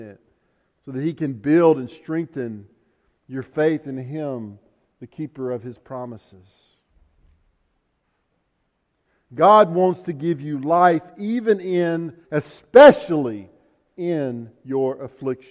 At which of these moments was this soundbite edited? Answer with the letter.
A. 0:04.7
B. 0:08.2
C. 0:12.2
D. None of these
C